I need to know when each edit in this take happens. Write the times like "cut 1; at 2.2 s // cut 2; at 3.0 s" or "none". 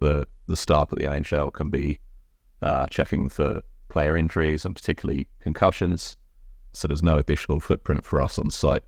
cut 1; at 6.7 s